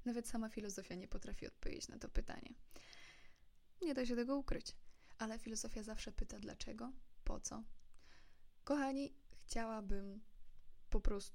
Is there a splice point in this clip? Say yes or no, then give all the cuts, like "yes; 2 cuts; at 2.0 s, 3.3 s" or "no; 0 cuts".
yes; 2 cuts; at 3.8 s, 8.6 s